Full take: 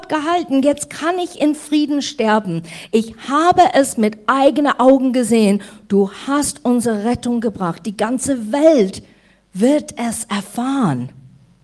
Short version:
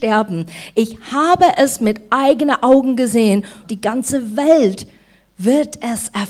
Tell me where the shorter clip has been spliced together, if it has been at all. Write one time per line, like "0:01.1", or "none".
0:03.6